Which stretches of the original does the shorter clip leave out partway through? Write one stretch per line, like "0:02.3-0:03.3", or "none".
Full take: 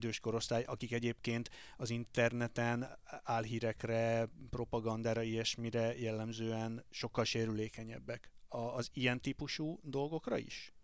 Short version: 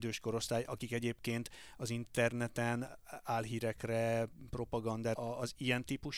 0:05.1-0:08.5